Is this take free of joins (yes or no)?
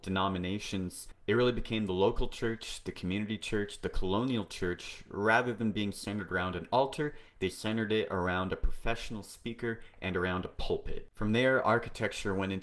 yes